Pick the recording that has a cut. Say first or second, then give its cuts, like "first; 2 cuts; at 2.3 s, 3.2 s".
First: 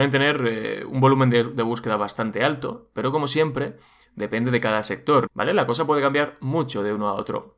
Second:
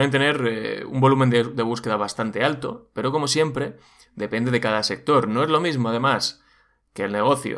first; 1 cut; at 5.3 s